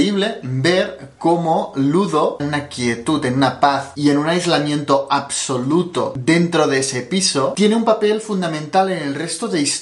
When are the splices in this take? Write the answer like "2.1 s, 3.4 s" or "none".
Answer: 2.4 s